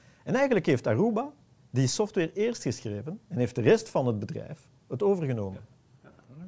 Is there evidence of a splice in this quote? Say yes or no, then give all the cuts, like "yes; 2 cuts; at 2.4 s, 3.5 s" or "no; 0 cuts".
no; 0 cuts